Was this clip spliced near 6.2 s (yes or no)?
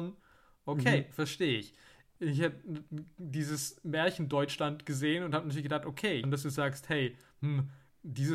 yes